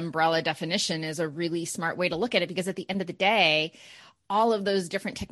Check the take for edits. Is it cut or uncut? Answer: uncut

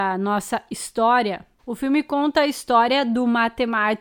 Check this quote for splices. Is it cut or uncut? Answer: cut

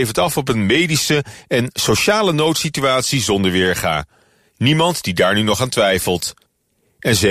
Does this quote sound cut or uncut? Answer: uncut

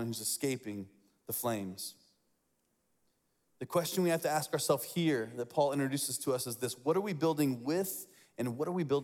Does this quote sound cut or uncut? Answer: uncut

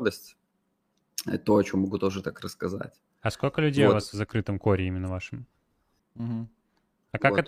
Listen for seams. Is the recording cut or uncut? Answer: cut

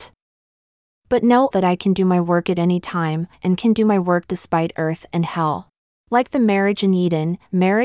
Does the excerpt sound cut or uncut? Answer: cut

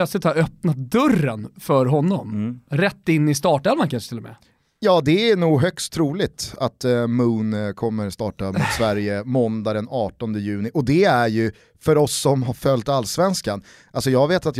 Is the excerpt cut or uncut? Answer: uncut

